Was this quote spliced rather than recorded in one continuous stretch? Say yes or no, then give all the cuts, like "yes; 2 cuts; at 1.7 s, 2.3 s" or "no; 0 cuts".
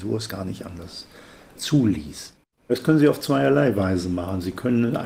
yes; 1 cut; at 2.5 s